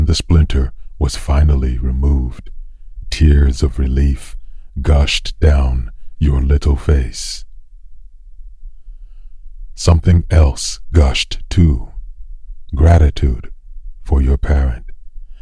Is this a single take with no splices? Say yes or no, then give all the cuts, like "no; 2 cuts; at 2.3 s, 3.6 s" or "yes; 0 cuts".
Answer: yes; 0 cuts